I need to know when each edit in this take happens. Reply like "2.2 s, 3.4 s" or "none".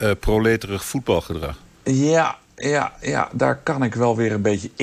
none